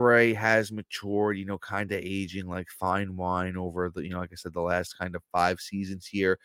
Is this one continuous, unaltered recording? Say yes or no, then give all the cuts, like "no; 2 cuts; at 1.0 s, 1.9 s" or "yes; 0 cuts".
yes; 0 cuts